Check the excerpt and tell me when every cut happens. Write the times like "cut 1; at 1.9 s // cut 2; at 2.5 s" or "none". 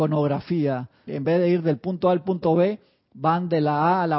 cut 1; at 1.1 s